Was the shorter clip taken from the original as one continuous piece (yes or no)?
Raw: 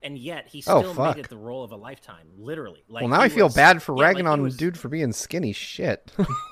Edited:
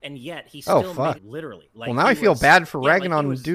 no